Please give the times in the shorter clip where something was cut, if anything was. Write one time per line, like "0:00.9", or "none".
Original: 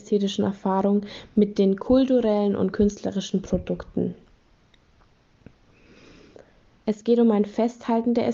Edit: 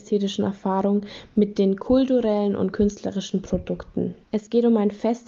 0:04.2